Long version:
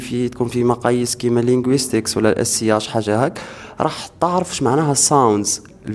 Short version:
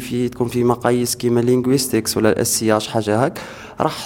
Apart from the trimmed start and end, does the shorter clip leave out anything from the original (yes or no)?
no